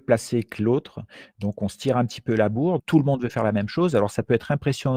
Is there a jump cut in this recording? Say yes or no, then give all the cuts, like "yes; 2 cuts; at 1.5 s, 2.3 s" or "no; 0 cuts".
yes; 1 cut; at 2.8 s